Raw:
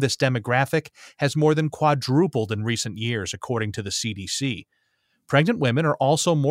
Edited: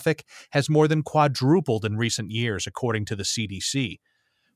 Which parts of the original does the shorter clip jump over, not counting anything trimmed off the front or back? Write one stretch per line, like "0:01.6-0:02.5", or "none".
none